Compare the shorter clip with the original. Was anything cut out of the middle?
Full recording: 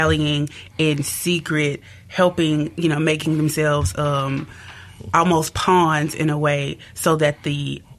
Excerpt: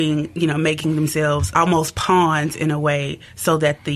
yes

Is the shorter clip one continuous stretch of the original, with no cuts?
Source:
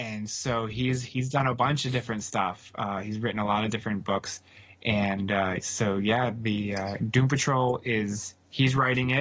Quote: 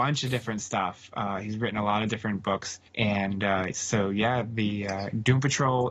no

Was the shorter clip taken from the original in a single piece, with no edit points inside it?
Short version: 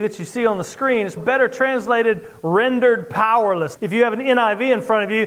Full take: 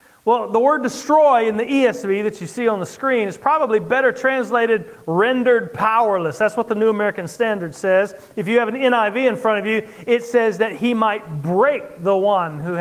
no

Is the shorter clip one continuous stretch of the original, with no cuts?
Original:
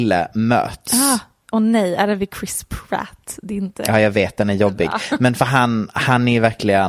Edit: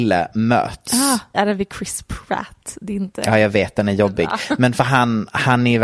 no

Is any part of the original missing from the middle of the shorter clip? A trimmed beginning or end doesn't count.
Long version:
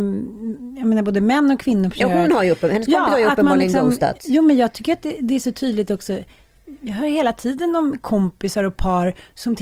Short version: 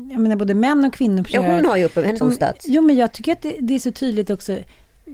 yes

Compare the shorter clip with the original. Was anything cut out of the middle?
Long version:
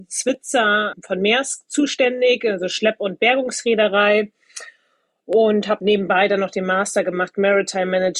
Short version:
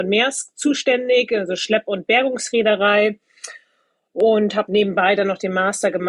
no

